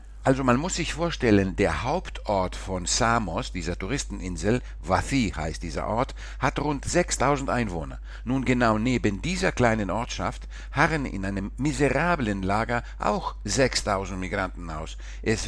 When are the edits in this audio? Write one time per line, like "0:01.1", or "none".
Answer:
none